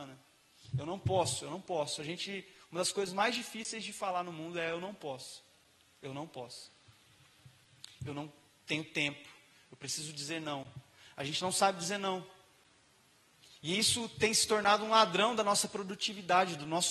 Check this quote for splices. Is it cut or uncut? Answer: uncut